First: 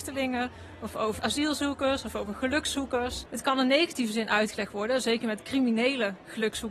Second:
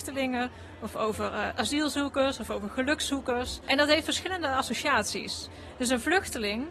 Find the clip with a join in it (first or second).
first